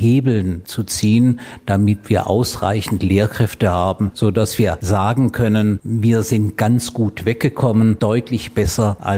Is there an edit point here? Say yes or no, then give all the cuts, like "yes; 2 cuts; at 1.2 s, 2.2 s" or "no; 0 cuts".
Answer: no; 0 cuts